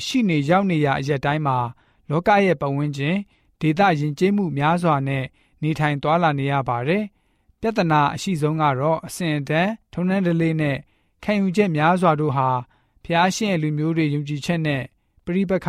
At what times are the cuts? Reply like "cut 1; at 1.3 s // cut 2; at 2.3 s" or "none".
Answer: cut 1; at 9.8 s